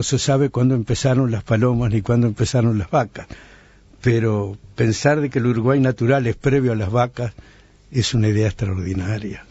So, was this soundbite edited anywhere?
no; 0 cuts

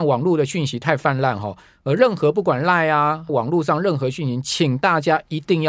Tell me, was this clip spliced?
yes; 1 cut; at 3.3 s

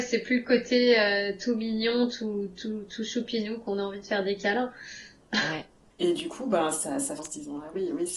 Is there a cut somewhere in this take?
yes; 2 cuts; at 5.9 s, 7.2 s

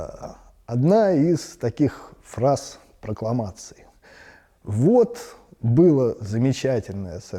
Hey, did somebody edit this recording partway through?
no; 0 cuts

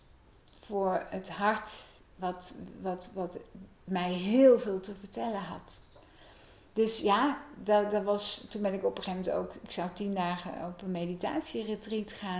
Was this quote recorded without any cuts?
no; 1 cut; at 2.0 s

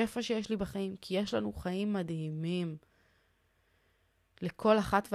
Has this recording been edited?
no; 0 cuts

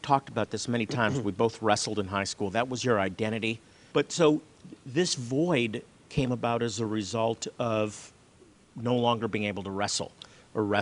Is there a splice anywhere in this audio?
no; 0 cuts

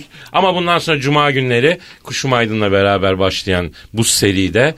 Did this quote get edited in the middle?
no; 0 cuts

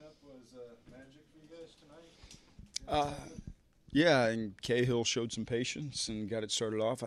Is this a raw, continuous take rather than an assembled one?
yes; 0 cuts

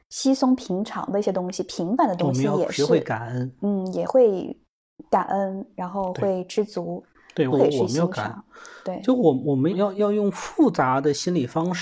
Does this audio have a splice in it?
yes; 2 cuts; at 7.5 s, 9.7 s

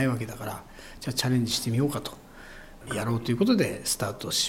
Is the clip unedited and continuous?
no; 1 cut; at 2.9 s

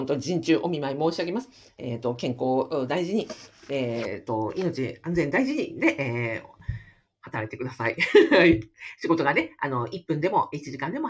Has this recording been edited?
no; 0 cuts

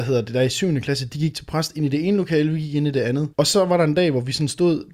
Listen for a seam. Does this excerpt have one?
yes; 1 cut; at 3.3 s

